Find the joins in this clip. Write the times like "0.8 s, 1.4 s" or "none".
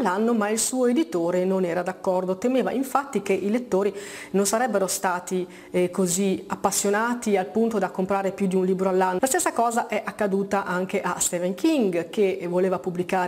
9.2 s